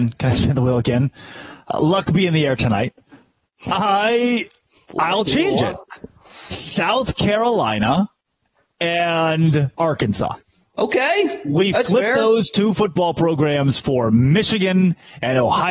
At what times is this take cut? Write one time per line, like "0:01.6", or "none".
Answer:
0:09.7